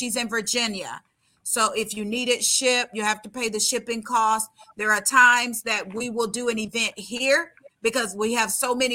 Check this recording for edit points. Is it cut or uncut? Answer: uncut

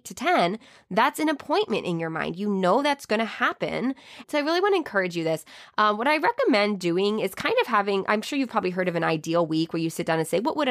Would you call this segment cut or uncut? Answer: cut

